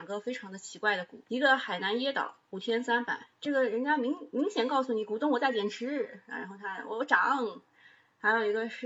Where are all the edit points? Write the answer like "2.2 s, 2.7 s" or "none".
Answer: 1.2 s